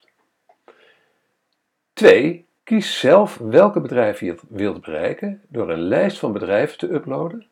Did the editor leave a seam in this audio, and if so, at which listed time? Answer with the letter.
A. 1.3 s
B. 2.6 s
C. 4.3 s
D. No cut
B